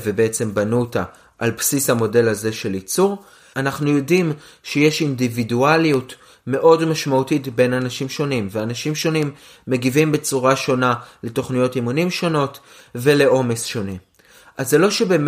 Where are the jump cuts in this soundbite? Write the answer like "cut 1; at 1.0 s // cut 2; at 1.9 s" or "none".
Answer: cut 1; at 3.5 s